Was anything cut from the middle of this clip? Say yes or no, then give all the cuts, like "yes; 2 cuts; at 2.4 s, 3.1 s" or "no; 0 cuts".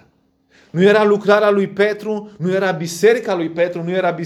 no; 0 cuts